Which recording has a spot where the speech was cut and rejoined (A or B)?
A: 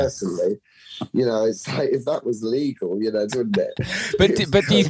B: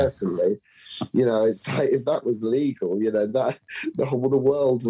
A